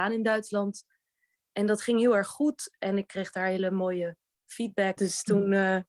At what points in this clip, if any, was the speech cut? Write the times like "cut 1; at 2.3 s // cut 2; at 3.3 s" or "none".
cut 1; at 5.0 s